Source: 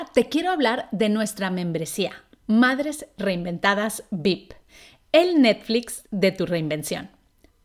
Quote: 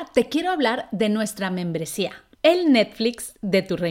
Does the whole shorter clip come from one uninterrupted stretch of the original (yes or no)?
no